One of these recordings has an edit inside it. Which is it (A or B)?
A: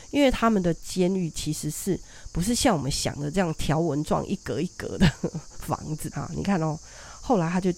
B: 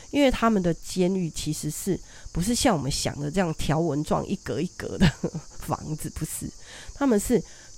A